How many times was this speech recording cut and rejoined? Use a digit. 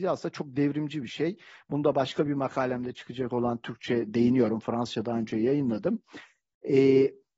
0